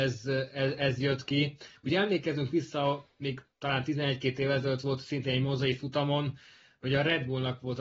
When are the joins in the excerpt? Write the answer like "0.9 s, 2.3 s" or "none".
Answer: none